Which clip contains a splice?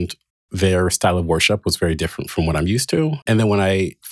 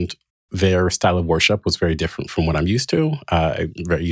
first; 1 cut; at 3.2 s

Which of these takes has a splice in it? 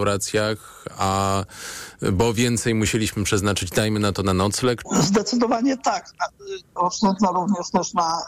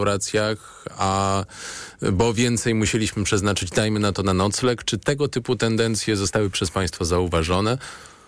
first; 2 cuts; at 4.8 s, 6.8 s

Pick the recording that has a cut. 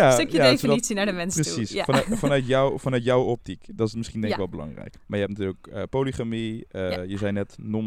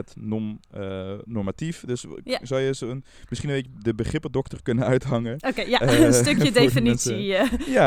first; 1 cut; at 5.0 s

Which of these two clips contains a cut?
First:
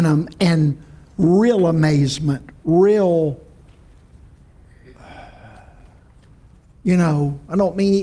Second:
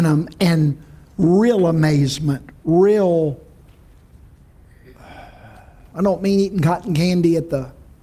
second; 1 cut; at 5.9 s

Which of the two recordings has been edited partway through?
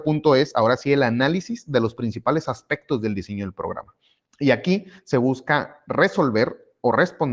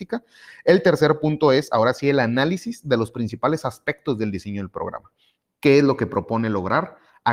second; 1 cut; at 5.4 s

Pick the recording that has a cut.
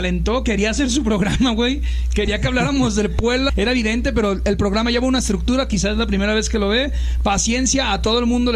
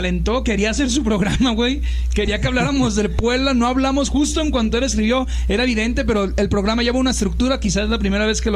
first; 1 cut; at 3.5 s

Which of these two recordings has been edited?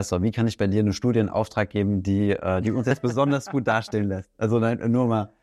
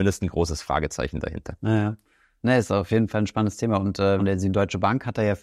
second; 1 cut; at 4.2 s

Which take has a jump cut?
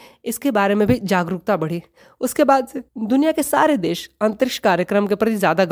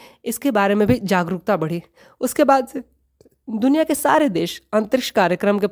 first; 1 cut; at 2.9 s

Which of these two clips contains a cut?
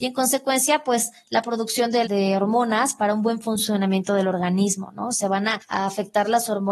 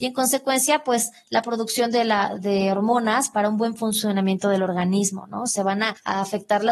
first; 1 cut; at 2.0 s

